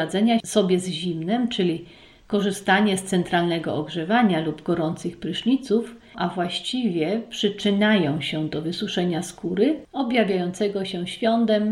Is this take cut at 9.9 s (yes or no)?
no